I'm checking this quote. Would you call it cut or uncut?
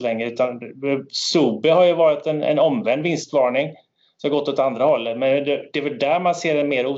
uncut